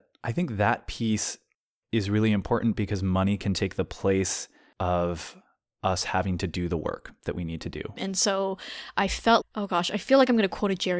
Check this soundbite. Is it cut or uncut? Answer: cut